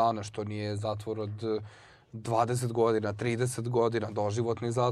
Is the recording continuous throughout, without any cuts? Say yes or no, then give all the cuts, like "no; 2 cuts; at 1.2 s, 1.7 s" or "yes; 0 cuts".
yes; 0 cuts